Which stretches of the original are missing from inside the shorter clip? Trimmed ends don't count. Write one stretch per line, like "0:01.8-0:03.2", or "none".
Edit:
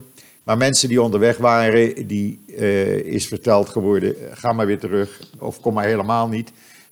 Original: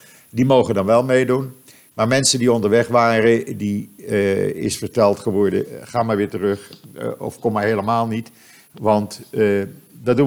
0:06.9-0:07.2